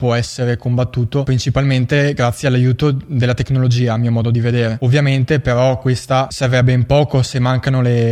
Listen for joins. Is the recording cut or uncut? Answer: uncut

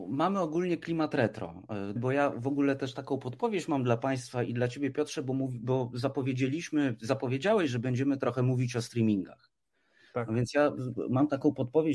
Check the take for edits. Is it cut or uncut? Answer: cut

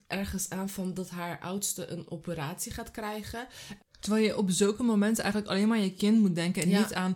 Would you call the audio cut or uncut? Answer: cut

